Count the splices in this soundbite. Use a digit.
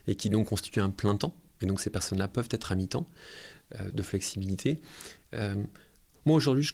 1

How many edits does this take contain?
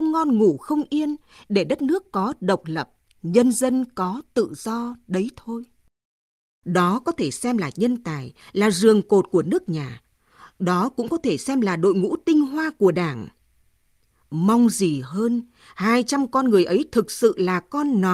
1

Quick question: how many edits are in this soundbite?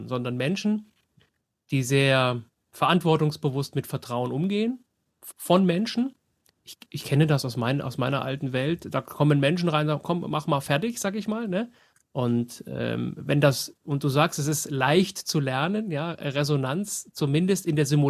1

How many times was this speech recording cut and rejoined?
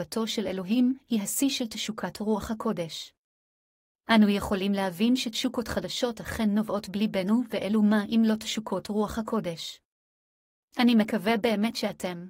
0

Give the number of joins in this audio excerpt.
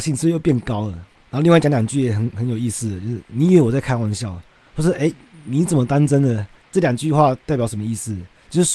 0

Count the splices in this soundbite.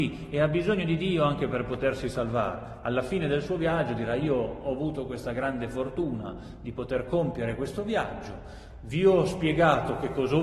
0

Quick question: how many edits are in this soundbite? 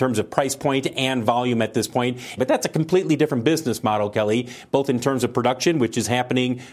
1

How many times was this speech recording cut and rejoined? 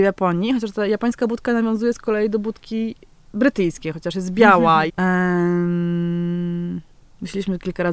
1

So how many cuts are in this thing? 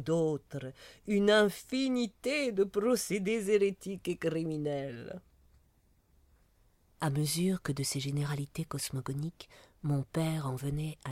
0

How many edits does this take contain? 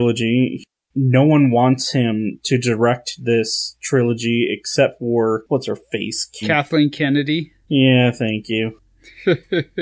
1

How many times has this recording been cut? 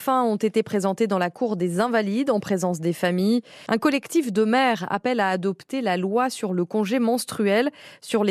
1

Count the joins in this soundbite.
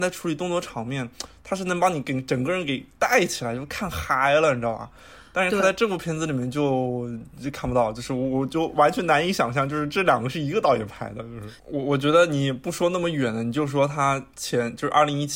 1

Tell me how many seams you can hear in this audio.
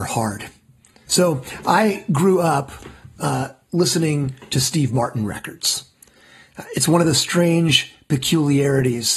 1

